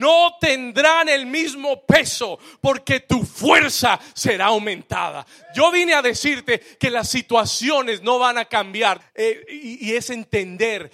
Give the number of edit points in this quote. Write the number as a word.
one